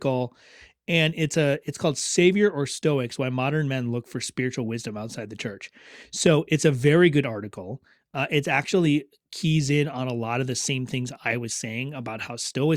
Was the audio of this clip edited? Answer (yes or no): no